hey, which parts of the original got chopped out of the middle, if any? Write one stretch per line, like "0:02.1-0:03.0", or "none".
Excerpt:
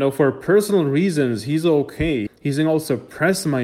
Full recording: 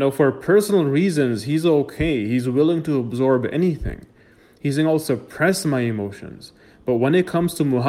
0:02.3-0:04.5